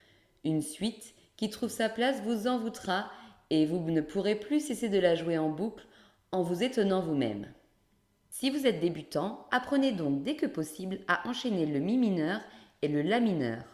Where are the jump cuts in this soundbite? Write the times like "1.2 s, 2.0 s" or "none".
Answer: none